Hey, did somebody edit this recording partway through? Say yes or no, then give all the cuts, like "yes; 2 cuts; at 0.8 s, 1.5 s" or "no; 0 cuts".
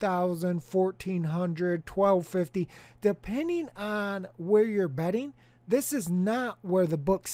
no; 0 cuts